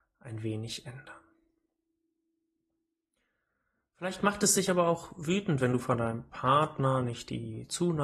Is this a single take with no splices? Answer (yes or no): yes